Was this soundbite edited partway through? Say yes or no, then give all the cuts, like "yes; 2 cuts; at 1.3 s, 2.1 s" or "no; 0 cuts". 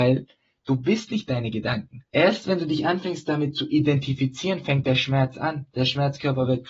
yes; 1 cut; at 2.1 s